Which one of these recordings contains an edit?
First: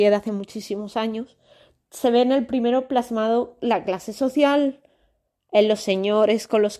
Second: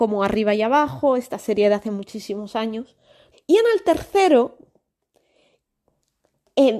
second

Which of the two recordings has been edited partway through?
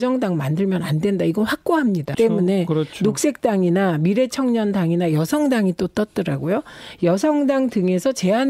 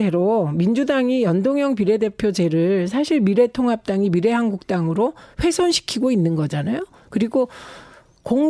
first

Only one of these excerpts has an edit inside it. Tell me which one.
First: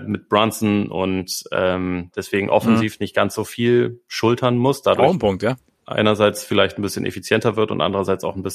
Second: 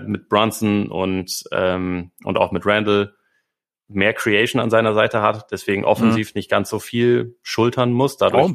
first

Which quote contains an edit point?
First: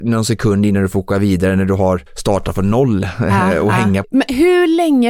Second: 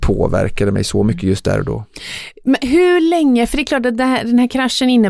first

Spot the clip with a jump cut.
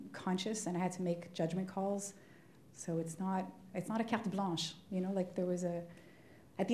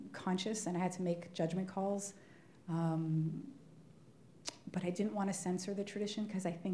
first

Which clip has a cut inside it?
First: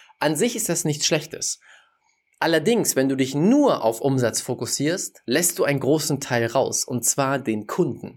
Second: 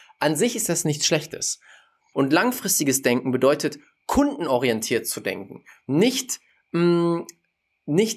second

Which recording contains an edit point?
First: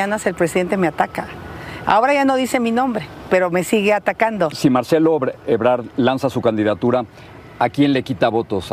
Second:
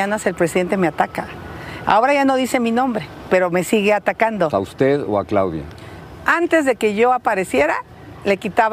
second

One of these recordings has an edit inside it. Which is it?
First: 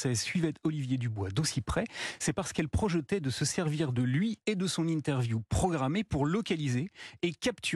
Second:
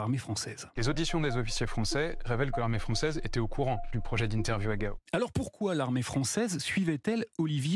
second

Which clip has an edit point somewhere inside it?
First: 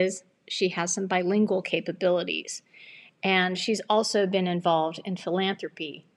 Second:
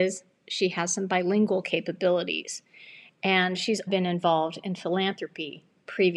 second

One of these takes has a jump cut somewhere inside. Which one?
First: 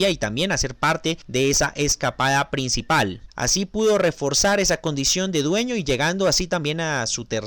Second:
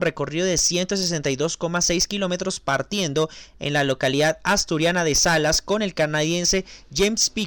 first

